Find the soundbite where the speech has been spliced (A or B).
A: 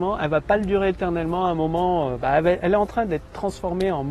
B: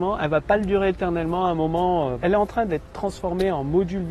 B